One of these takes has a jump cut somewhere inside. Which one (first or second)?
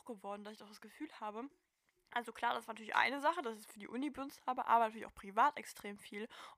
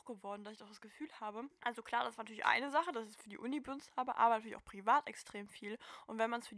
second